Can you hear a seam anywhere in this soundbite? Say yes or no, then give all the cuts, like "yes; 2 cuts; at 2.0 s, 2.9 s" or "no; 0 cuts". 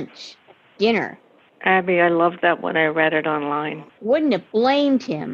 yes; 2 cuts; at 1.5 s, 3.9 s